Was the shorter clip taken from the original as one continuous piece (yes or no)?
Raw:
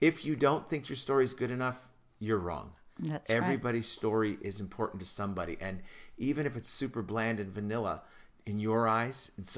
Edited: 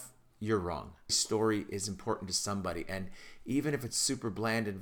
no